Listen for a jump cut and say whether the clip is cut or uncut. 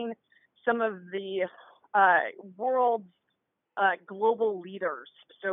uncut